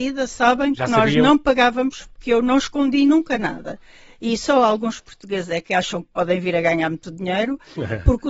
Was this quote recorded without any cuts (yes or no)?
yes